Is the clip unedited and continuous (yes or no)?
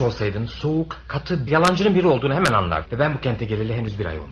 no